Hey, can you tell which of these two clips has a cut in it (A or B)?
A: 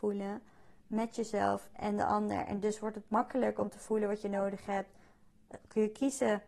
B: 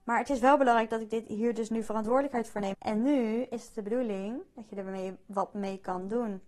B